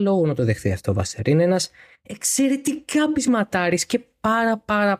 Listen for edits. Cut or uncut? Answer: uncut